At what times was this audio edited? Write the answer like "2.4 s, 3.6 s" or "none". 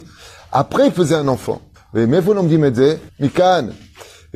1.8 s, 3.1 s

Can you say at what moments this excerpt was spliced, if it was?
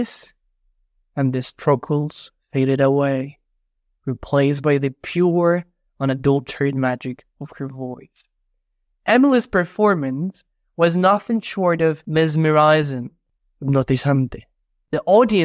none

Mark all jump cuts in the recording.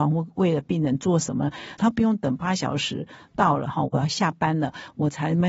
1.8 s

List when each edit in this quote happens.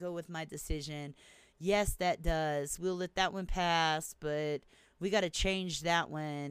none

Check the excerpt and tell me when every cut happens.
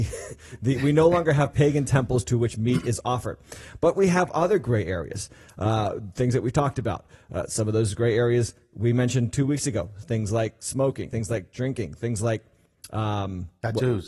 11.1 s

